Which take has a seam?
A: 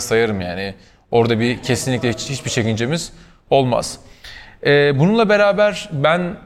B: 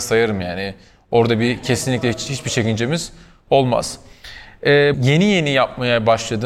B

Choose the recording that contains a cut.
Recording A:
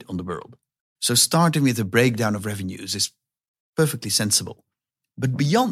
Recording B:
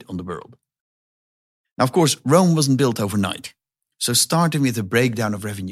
A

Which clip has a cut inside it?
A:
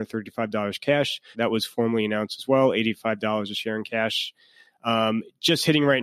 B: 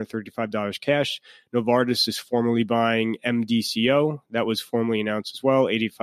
A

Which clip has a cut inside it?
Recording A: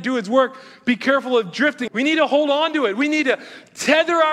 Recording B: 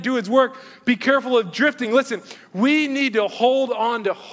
A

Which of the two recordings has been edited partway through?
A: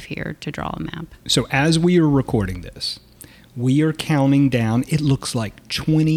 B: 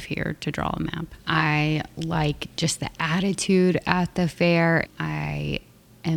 B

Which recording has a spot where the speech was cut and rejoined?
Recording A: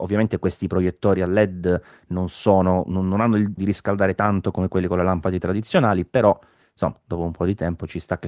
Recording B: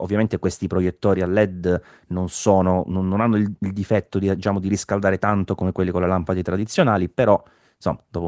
A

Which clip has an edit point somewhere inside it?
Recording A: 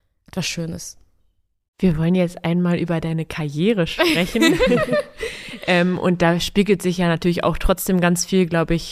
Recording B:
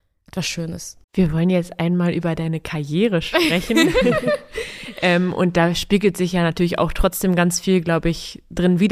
B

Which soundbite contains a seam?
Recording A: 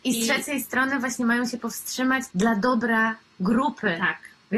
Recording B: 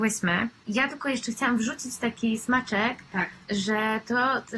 A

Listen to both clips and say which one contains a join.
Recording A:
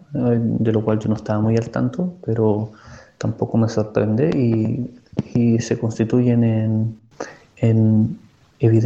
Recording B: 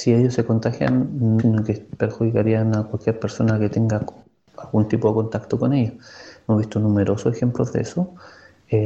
B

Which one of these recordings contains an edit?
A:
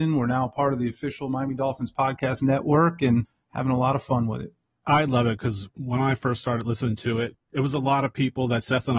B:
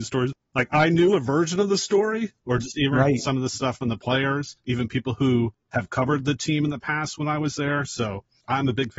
B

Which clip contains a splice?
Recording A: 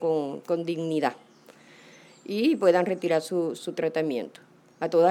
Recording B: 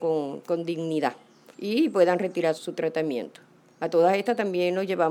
B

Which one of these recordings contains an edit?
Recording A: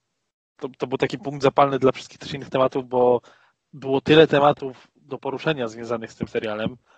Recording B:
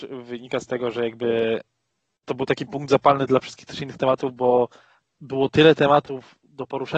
B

